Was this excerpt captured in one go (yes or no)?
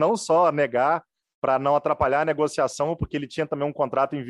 yes